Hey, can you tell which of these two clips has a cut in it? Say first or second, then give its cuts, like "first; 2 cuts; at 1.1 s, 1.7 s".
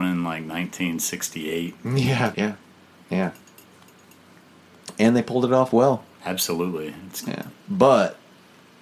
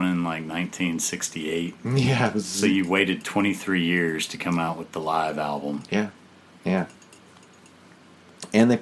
first; 2 cuts; at 2.3 s, 7.5 s